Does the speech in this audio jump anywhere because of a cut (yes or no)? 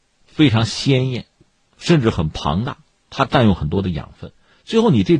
no